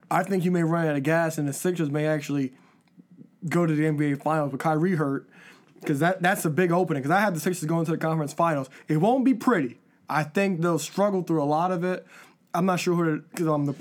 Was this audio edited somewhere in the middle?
no; 0 cuts

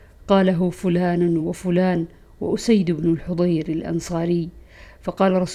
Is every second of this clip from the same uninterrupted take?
no; 1 cut; at 1.4 s

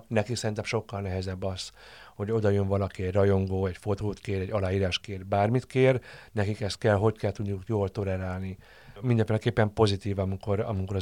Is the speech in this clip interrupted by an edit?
yes; 1 cut; at 9.0 s

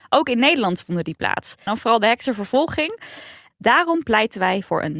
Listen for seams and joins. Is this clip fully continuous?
no; 2 cuts; at 1.7 s, 3.5 s

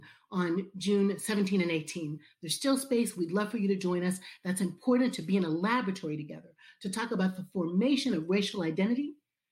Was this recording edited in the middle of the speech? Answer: no; 0 cuts

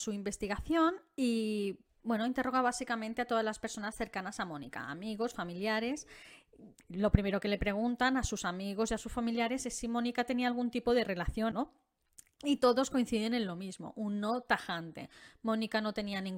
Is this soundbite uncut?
no; 2 cuts; at 6.8 s, 11.5 s

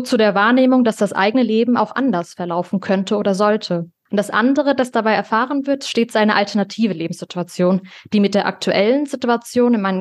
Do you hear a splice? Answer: no; 0 cuts

